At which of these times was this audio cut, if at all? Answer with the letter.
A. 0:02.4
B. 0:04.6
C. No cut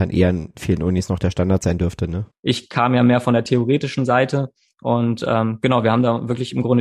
A